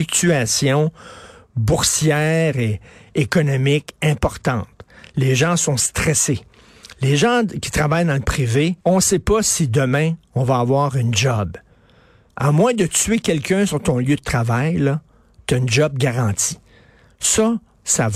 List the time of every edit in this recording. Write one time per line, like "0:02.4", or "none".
0:08.8
0:12.3